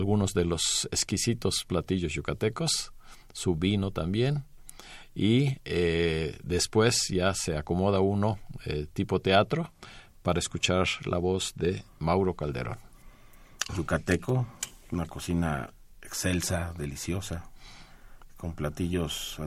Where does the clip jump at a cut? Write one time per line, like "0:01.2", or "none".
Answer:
0:13.7